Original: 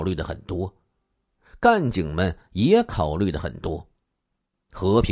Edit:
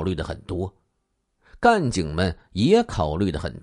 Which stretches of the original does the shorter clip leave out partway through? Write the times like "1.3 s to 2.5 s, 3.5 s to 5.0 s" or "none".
none